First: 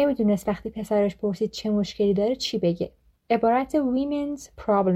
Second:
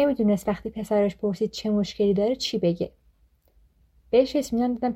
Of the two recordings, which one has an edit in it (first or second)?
first